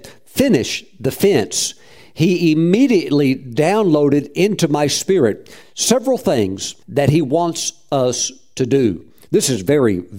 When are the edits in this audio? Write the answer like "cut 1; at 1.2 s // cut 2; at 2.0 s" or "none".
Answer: cut 1; at 6.8 s